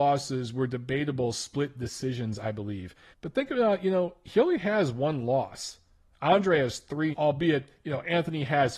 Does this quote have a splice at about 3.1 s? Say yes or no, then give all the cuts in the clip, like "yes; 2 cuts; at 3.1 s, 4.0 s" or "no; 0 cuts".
yes; 2 cuts; at 3.1 s, 7.1 s